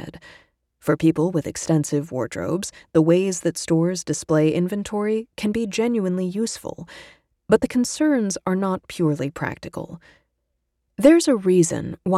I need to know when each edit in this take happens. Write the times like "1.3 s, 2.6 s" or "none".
none